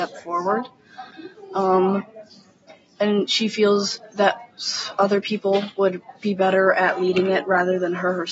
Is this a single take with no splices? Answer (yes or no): yes